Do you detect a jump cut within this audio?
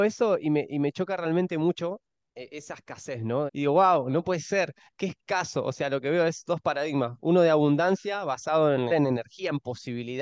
yes; 2 cuts; at 3.5 s, 8.9 s

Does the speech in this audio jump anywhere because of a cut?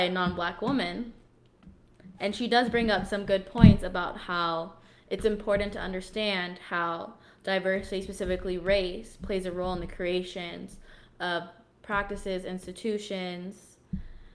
no; 0 cuts

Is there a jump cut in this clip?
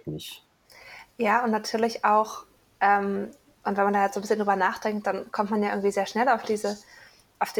no; 0 cuts

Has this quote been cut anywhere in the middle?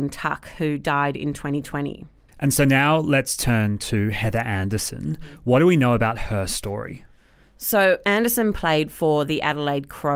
yes; 1 cut; at 2.3 s

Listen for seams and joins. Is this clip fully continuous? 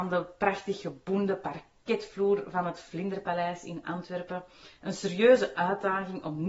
yes; 0 cuts

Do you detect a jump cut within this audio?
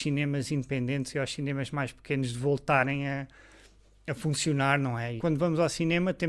yes; 1 cut; at 5.2 s

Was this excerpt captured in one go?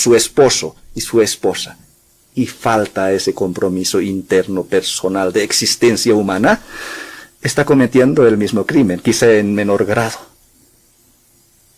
yes; 0 cuts

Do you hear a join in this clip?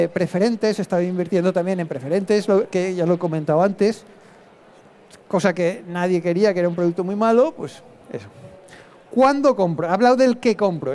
no; 0 cuts

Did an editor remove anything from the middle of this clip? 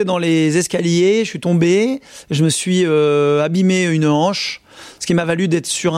no; 0 cuts

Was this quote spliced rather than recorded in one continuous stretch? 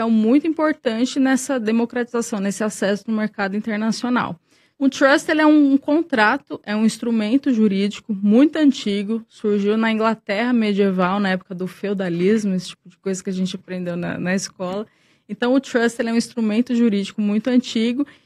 yes; 1 cut; at 4.7 s

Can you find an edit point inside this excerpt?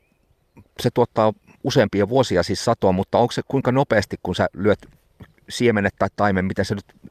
no; 0 cuts

